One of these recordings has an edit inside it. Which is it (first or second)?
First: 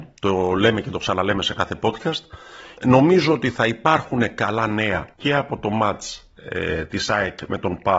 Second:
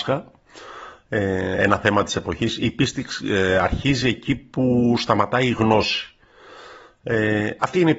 first